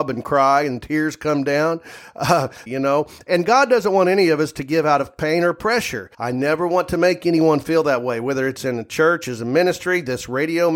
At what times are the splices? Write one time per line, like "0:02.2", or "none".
0:02.7
0:06.1